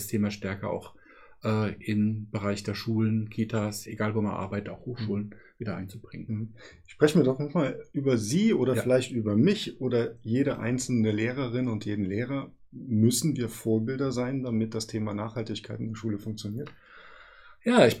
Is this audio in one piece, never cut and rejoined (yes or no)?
yes